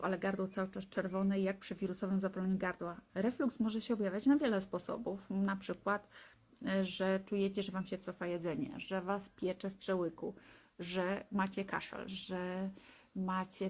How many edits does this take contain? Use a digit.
2